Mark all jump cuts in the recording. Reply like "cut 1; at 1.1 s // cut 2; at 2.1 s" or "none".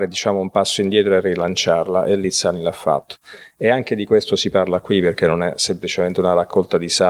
none